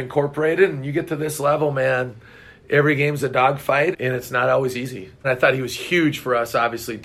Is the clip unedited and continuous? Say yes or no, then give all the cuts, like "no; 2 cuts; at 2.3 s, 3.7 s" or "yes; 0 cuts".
no; 2 cuts; at 3.9 s, 5.2 s